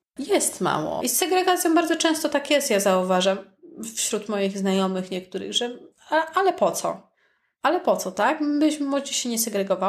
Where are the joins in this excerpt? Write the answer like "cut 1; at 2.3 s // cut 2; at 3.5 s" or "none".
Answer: cut 1; at 1.0 s